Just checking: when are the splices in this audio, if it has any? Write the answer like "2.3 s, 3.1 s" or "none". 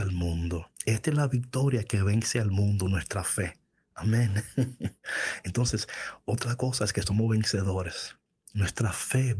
none